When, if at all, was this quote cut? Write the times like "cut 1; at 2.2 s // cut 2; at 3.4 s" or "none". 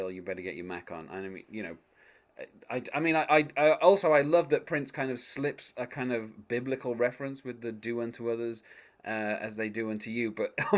none